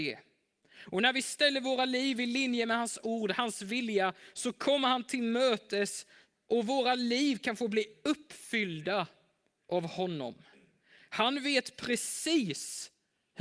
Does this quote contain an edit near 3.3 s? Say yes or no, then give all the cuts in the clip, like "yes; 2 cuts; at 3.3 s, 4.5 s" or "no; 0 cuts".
no; 0 cuts